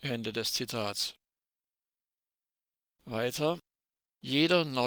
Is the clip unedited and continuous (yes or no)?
yes